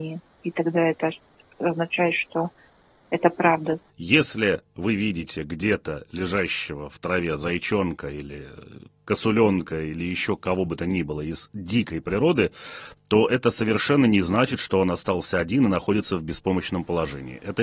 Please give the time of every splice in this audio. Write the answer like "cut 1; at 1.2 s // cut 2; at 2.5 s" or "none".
cut 1; at 3.9 s